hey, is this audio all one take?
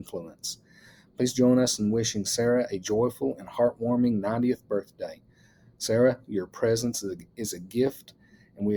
yes; 0 cuts

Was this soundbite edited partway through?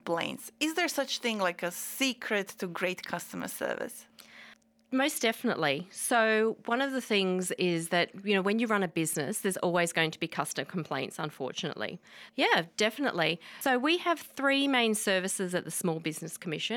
yes; 1 cut; at 12.3 s

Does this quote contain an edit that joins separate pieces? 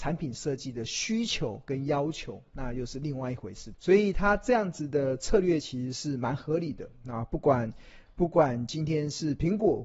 yes; 1 cut; at 3.7 s

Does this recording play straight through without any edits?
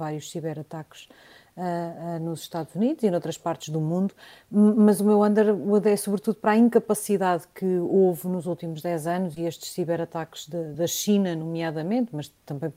yes; 0 cuts

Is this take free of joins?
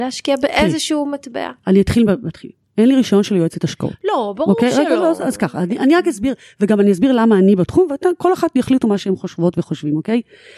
yes; 0 cuts

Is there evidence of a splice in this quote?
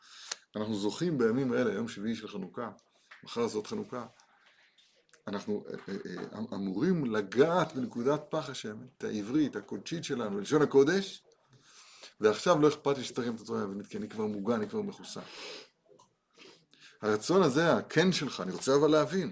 yes; 1 cut; at 9.0 s

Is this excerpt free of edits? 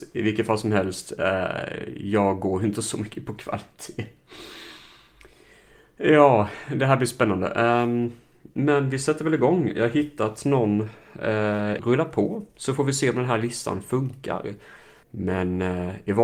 no; 2 cuts; at 11.8 s, 15.0 s

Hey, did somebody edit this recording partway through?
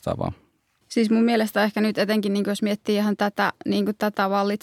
no; 0 cuts

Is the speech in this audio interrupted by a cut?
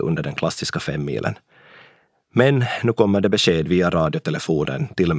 no; 0 cuts

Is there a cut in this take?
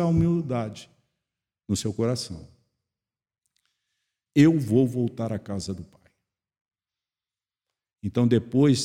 yes; 1 cut; at 4.3 s

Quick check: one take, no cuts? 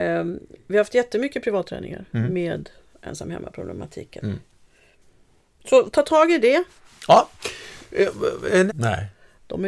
no; 1 cut; at 8.7 s

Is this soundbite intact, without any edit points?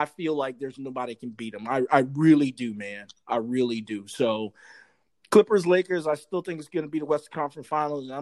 yes; 0 cuts

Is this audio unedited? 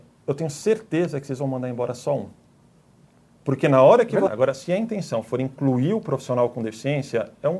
no; 1 cut; at 4.3 s

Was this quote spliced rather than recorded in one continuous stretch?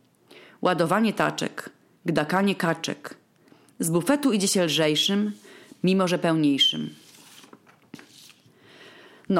no; 0 cuts

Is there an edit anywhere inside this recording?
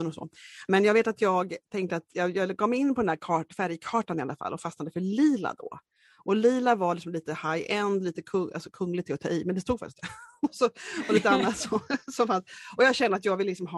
no; 0 cuts

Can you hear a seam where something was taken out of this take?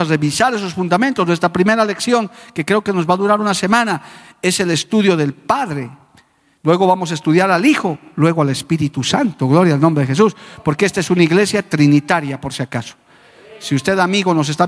no; 0 cuts

